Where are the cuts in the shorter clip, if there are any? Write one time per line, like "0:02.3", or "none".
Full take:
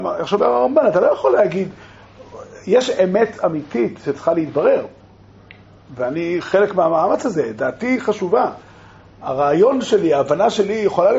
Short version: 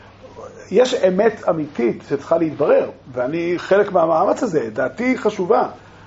0:03.0